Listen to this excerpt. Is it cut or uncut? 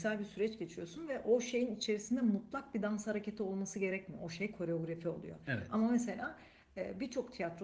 uncut